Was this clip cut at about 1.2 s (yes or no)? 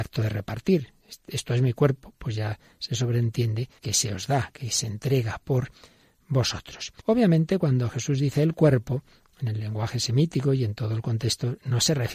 no